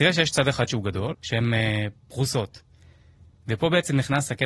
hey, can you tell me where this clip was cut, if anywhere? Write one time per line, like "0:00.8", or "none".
0:01.1